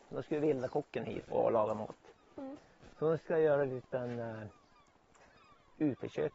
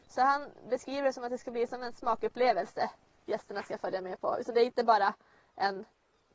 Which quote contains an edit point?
first; 1 cut; at 1.3 s

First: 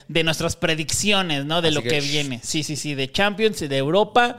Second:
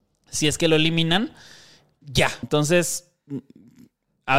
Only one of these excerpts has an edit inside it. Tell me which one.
second; 1 cut; at 2.4 s

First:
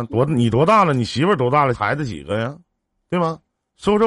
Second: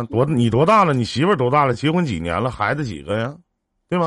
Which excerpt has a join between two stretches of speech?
first; 1 cut; at 1.7 s

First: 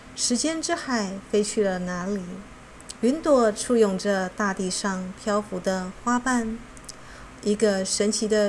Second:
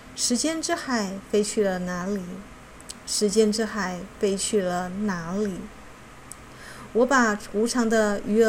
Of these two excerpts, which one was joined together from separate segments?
first; 2 cuts; at 3.0 s, 7.4 s

